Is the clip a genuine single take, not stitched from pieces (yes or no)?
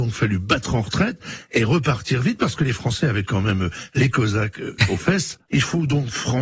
no